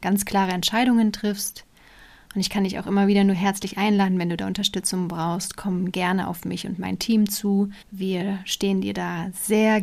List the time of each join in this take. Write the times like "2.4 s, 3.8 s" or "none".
7.8 s